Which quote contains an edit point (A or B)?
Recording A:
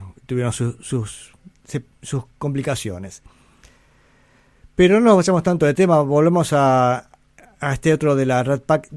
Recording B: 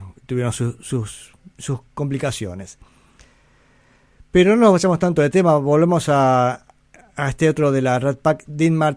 B